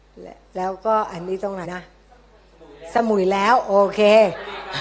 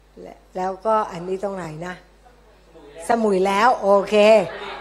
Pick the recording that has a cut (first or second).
first